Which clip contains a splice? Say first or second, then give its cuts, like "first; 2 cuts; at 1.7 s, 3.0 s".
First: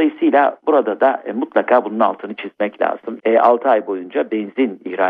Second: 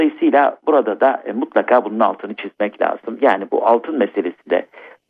first; 1 cut; at 3.2 s